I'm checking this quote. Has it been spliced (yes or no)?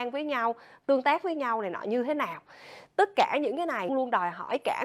yes